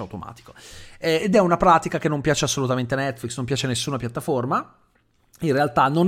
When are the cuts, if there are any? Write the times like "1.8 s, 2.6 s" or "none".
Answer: none